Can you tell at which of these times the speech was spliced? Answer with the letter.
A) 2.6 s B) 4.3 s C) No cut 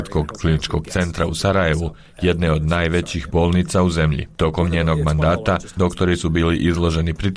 C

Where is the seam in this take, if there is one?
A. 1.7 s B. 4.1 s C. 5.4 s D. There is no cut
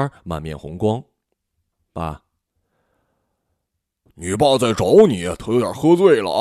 D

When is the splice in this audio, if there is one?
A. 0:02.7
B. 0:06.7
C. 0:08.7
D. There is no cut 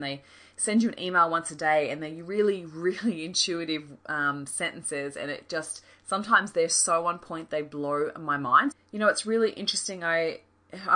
C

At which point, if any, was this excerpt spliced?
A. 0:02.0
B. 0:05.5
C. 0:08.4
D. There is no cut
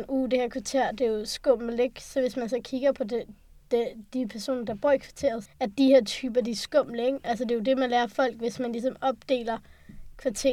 B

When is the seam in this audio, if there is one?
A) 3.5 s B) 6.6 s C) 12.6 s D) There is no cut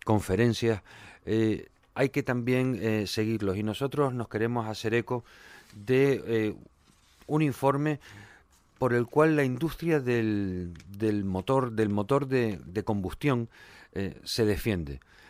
D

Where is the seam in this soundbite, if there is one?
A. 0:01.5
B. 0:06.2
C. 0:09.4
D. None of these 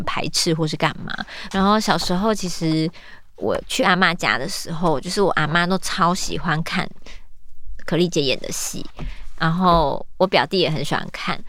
A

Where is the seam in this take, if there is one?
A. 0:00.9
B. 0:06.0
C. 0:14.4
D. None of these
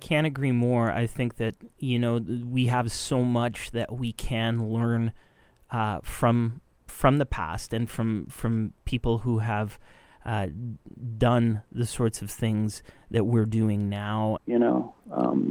C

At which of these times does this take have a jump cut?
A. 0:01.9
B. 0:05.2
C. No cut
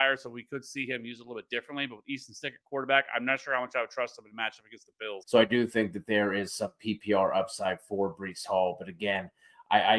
B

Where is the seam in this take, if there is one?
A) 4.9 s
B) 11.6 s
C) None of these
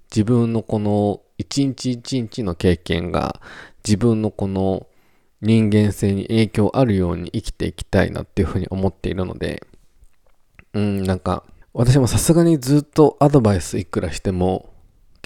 B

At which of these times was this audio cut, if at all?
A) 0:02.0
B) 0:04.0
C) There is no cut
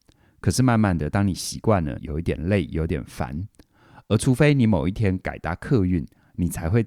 A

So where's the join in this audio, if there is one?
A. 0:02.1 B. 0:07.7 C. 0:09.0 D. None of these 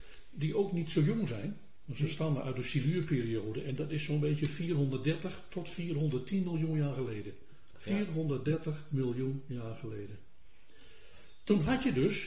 B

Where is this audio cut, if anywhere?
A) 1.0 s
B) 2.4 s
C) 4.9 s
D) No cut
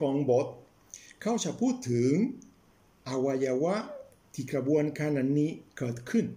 D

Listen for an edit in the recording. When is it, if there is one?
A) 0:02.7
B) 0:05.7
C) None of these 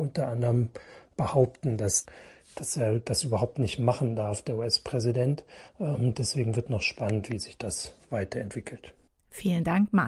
C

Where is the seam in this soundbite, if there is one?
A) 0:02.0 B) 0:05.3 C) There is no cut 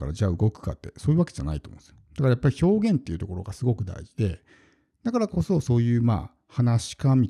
C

